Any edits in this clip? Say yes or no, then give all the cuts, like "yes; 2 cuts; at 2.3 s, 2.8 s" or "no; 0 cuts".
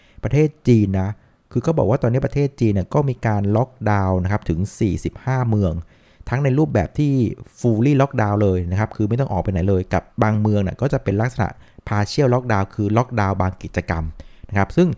yes; 1 cut; at 10.1 s